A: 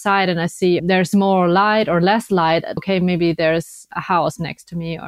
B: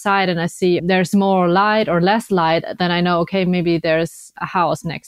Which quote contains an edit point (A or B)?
A